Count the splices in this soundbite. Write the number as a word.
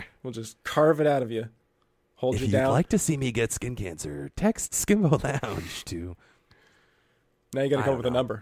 zero